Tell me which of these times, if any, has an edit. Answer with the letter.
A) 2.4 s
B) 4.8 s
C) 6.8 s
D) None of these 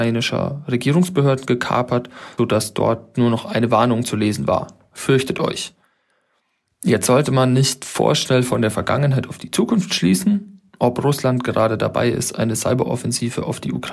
A